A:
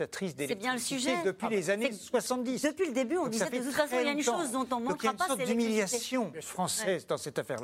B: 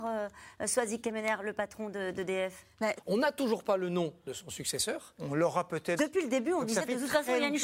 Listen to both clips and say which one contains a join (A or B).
B